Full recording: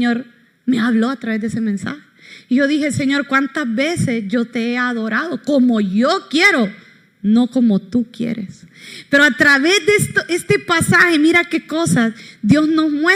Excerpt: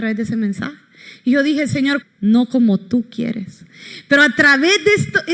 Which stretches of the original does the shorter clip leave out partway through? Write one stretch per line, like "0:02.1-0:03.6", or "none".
0:03.3-0:07.0